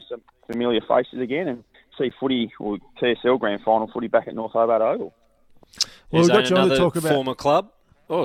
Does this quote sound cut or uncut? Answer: uncut